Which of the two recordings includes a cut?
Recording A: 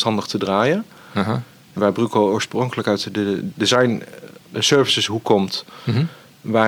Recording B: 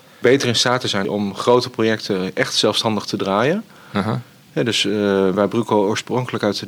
A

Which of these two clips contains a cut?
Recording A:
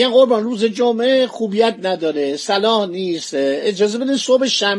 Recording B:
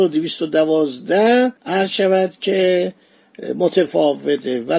B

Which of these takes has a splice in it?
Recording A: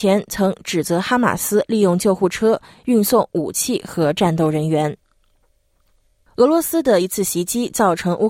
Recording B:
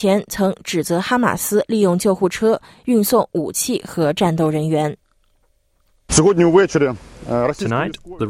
B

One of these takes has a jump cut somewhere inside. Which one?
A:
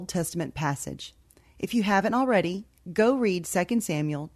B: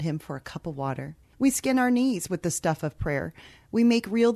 B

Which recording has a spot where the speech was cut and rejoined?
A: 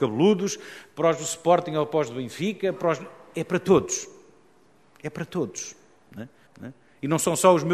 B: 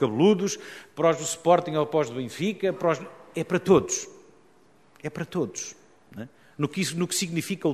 A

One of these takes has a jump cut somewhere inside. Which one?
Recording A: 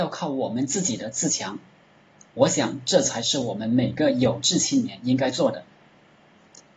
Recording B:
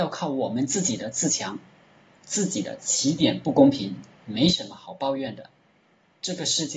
B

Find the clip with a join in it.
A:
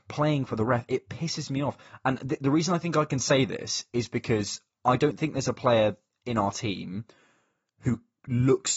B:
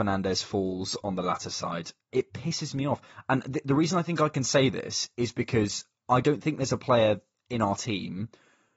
B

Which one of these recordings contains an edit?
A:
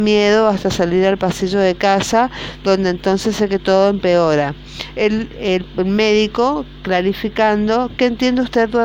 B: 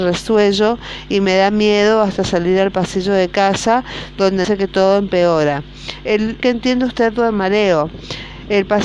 B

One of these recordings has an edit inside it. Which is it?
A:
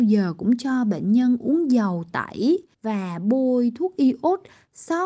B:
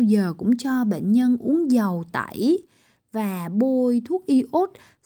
A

